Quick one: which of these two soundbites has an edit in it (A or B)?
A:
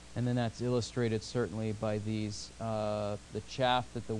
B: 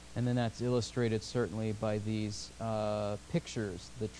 A